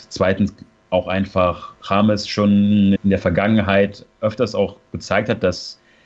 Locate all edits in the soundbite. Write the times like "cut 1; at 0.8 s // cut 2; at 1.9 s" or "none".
cut 1; at 3.0 s